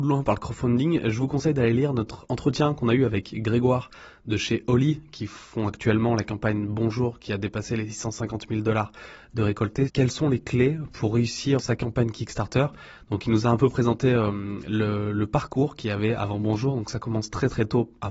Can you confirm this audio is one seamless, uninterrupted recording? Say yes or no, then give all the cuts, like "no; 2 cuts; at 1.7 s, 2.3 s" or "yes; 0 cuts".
no; 2 cuts; at 9.9 s, 11.6 s